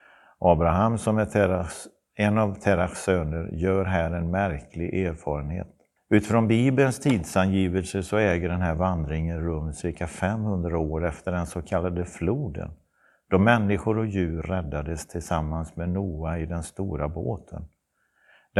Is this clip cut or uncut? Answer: cut